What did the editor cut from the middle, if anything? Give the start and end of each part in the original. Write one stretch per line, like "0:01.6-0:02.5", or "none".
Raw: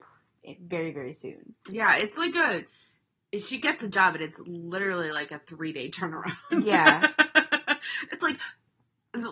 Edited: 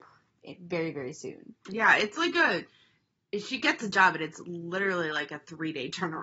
none